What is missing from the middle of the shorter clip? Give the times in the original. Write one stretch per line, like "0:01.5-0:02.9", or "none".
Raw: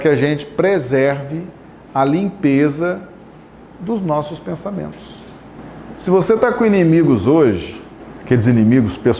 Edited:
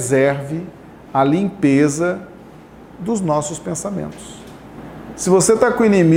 none